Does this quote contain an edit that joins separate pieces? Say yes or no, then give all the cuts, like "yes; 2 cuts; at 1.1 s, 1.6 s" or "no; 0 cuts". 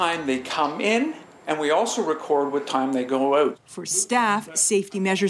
no; 0 cuts